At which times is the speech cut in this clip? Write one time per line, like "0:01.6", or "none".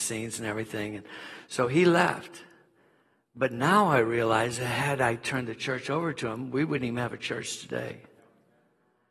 none